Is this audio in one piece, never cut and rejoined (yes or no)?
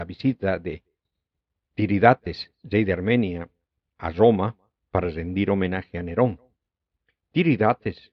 yes